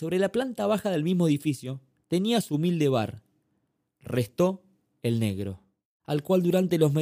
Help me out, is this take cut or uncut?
cut